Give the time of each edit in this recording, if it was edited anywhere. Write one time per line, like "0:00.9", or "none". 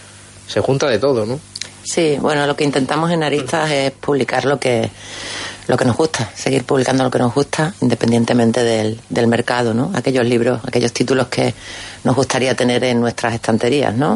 none